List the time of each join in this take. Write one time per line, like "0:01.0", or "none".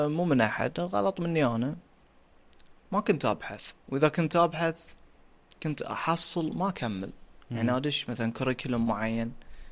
0:03.8